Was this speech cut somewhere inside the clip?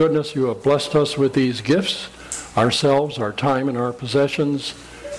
no; 0 cuts

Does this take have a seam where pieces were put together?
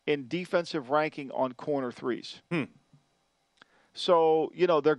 no; 0 cuts

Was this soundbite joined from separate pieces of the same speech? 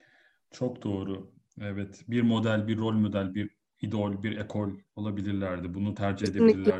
no; 0 cuts

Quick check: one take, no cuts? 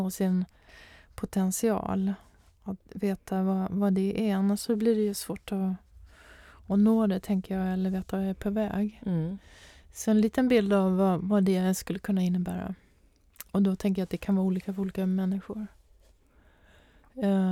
yes; 0 cuts

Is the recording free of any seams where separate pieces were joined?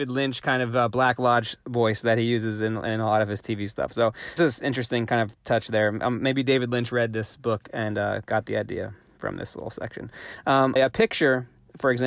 no; 2 cuts; at 4.4 s, 10.8 s

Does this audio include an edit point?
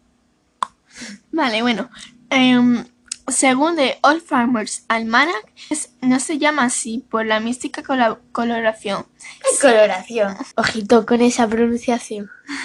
yes; 2 cuts; at 5.7 s, 10.5 s

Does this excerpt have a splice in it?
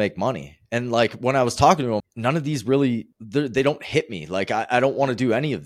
yes; 2 cuts; at 2.0 s, 3.1 s

